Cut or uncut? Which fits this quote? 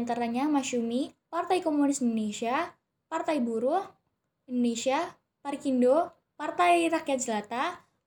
cut